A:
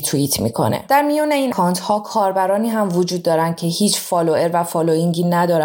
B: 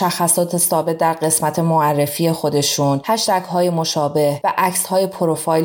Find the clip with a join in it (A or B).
A